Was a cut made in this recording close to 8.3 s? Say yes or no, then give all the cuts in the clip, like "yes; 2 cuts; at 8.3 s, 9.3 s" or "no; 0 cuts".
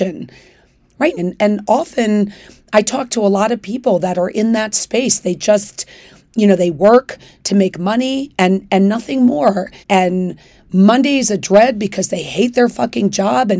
no; 2 cuts; at 1.2 s, 9.8 s